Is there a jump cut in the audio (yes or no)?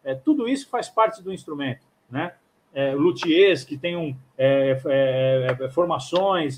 no